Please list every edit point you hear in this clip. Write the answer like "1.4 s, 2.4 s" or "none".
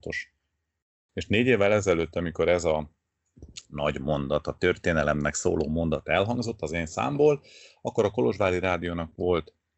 1.1 s